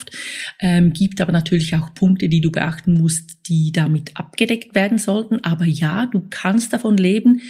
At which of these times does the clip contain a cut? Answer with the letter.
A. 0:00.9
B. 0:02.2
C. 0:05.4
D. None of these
D